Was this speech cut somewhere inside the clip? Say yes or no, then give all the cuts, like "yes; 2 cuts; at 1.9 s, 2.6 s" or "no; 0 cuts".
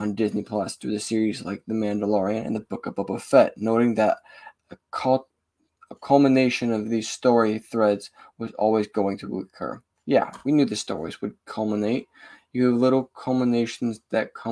no; 0 cuts